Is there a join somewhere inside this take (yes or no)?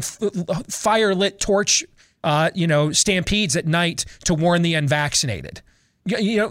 no